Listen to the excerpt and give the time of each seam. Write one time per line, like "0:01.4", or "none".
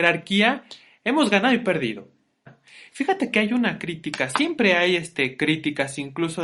0:02.5